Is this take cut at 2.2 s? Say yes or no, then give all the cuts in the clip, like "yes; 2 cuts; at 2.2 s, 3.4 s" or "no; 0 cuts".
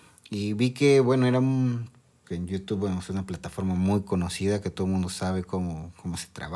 yes; 1 cut; at 2.2 s